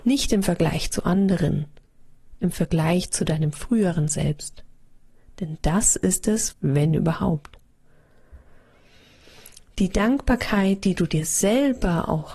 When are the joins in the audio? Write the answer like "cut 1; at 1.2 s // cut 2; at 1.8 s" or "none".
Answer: cut 1; at 6.5 s